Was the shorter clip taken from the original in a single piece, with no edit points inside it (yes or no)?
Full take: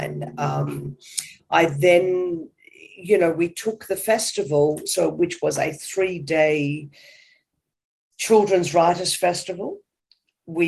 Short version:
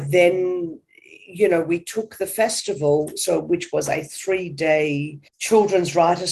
no